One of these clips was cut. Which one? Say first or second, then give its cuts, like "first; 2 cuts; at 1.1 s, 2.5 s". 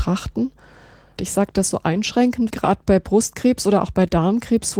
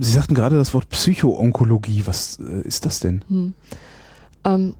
first; 2 cuts; at 1.2 s, 2.5 s